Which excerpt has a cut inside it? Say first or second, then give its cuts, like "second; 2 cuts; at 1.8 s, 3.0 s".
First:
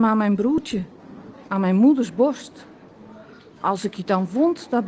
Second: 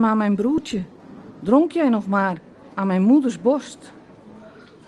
first; 1 cut; at 1.3 s